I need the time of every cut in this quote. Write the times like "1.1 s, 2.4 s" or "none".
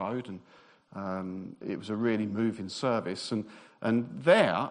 1.6 s